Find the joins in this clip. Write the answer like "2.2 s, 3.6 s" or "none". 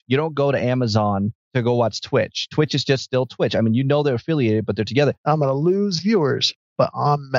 5.2 s